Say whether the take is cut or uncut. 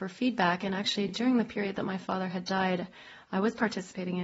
uncut